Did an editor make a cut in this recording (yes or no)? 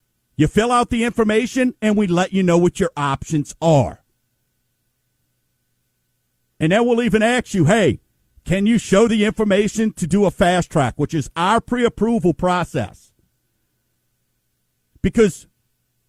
no